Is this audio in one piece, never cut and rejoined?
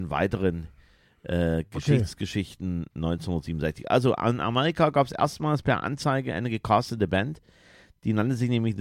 yes; 0 cuts

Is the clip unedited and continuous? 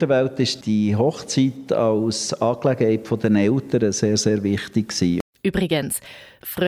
yes; 0 cuts

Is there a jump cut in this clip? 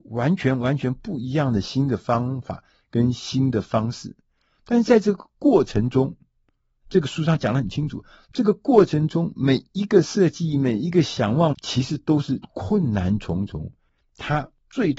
yes; 1 cut; at 11.5 s

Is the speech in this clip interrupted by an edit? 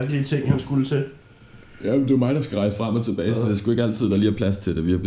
no; 0 cuts

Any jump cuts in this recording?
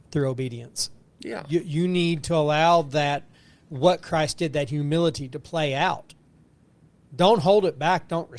no; 0 cuts

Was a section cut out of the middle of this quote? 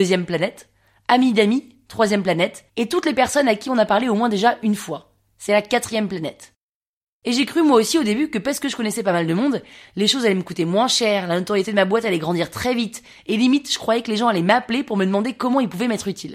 yes; 1 cut; at 2.7 s

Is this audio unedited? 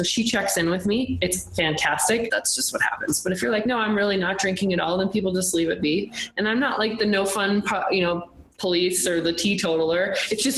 no; 1 cut; at 2.3 s

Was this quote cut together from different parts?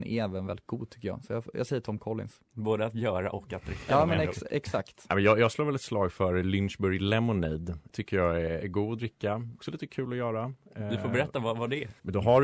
yes; 1 cut; at 8.6 s

